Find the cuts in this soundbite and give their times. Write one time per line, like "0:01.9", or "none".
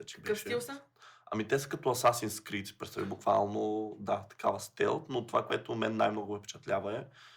none